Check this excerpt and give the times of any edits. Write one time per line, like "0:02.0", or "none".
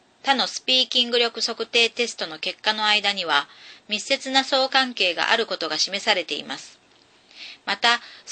0:04.7

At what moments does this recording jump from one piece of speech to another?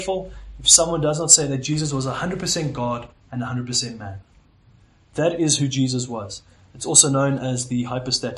none

